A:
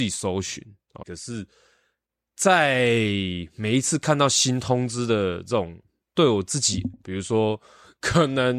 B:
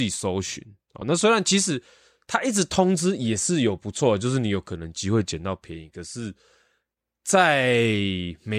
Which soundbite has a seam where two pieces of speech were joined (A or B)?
A